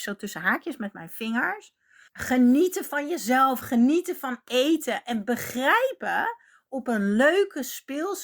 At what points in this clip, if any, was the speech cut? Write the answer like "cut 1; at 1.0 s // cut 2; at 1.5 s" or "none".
cut 1; at 2.1 s // cut 2; at 3.6 s